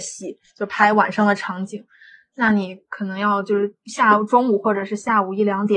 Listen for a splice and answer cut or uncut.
uncut